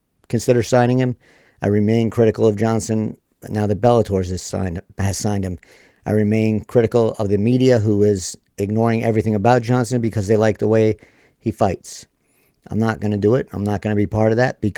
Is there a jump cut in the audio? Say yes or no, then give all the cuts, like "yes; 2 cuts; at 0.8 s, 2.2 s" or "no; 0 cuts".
no; 0 cuts